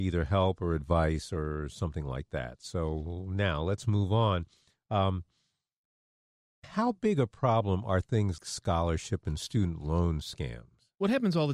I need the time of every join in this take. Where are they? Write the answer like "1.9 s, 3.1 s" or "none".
8.4 s